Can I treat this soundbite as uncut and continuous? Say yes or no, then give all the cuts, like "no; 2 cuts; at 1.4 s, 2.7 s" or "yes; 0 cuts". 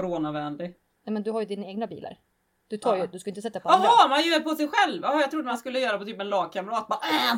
no; 1 cut; at 3.1 s